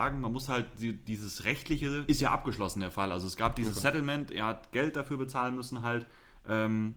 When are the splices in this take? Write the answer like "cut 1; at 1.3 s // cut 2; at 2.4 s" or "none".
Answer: cut 1; at 2.1 s